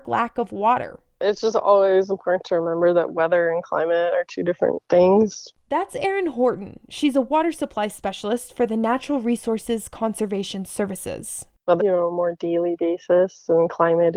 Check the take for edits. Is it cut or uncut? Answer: cut